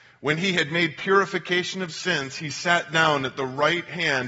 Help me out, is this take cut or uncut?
uncut